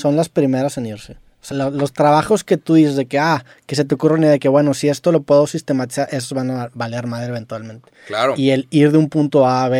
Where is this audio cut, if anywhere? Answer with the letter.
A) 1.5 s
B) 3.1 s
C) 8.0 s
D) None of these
A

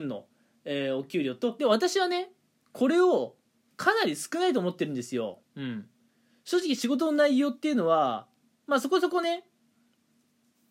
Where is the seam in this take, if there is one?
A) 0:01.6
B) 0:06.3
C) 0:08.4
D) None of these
A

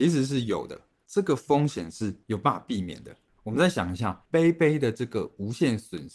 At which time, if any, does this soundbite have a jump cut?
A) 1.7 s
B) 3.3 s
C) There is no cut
C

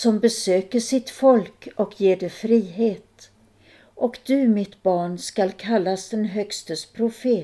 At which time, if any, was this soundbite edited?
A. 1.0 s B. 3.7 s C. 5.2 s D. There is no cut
B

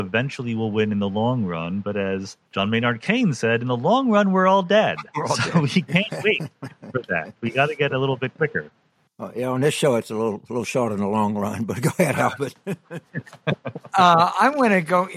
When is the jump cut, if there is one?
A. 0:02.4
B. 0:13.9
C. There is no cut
A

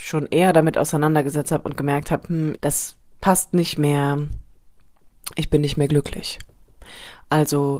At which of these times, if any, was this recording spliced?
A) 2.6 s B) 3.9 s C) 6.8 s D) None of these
A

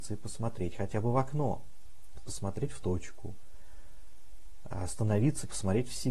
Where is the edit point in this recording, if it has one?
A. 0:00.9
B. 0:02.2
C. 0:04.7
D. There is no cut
B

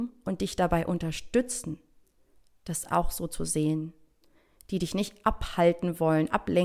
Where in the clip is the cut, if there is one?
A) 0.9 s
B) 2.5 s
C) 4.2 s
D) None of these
D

